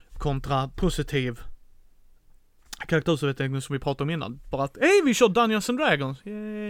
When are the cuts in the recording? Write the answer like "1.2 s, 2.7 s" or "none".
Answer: 4.5 s